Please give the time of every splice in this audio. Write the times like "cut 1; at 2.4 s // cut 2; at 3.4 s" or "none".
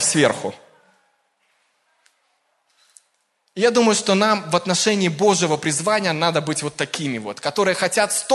none